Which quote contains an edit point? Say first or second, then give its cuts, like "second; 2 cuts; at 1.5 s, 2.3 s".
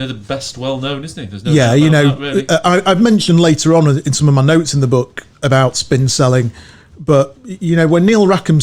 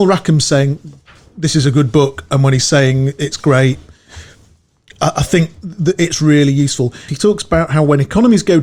second; 1 cut; at 7.1 s